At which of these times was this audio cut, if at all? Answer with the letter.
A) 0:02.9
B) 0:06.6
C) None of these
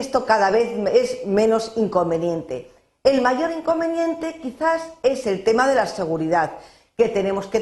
C